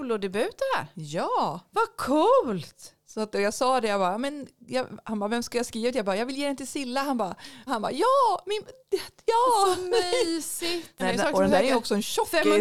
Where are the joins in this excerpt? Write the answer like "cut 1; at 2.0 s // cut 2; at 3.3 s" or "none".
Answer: cut 1; at 7.7 s // cut 2; at 11.0 s